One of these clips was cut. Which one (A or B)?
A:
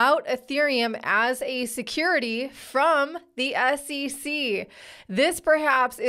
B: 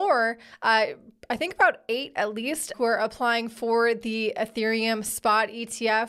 B